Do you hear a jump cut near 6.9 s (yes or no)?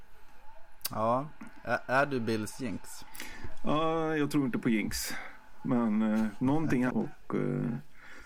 yes